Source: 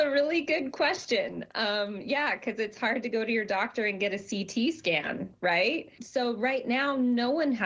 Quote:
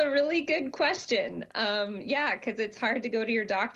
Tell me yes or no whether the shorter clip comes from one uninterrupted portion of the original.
yes